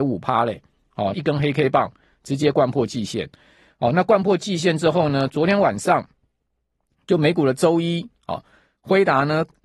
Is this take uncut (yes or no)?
no